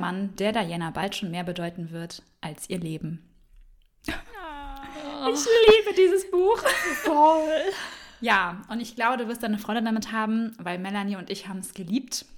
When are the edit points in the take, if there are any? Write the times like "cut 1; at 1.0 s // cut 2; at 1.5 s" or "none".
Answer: cut 1; at 7.0 s